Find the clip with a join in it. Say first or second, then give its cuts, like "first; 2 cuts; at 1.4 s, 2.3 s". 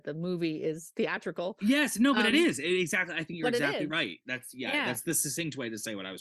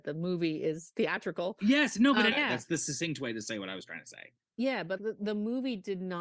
second; 2 cuts; at 2.3 s, 5.0 s